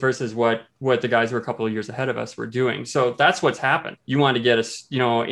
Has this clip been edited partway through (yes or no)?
yes